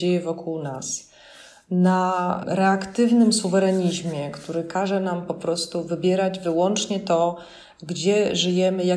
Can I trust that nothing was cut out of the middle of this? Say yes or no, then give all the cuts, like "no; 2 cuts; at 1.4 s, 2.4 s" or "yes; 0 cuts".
yes; 0 cuts